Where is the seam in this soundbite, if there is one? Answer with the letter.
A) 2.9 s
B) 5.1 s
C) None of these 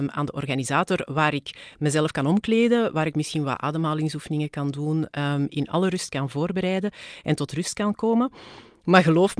C